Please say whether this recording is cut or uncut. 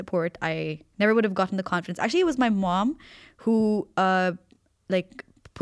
uncut